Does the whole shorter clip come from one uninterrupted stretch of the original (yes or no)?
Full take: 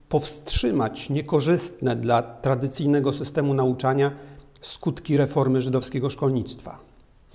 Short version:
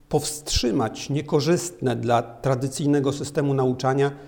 yes